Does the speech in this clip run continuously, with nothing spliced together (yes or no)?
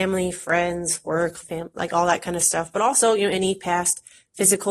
no